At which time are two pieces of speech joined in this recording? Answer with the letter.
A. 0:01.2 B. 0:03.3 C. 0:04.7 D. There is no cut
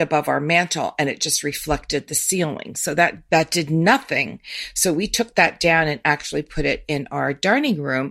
B